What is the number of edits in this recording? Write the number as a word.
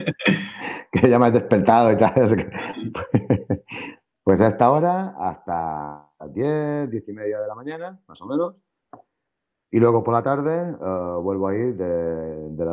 zero